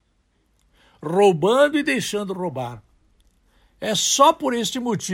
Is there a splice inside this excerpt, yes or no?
no